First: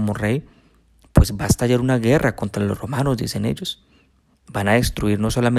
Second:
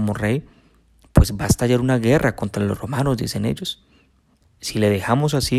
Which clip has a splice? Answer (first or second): second